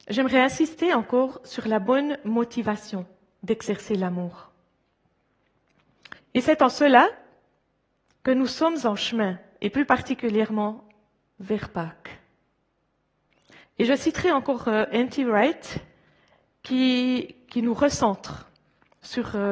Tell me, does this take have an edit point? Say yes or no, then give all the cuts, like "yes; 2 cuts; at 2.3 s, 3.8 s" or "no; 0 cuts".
yes; 2 cuts; at 6.2 s, 13.6 s